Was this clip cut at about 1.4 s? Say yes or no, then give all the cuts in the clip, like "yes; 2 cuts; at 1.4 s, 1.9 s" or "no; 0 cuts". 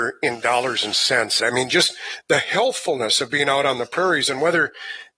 yes; 1 cut; at 1.4 s